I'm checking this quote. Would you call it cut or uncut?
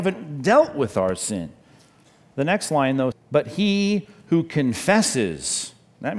cut